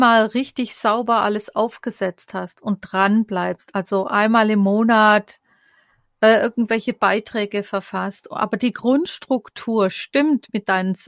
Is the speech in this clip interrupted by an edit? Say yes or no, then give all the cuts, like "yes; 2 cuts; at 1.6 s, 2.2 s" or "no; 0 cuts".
no; 0 cuts